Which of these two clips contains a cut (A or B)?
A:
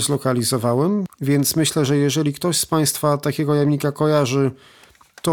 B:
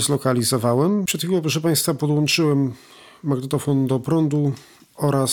A